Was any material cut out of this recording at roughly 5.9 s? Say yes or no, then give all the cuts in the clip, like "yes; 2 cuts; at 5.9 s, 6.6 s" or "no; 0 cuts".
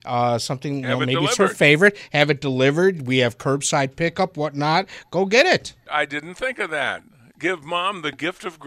yes; 1 cut; at 5.9 s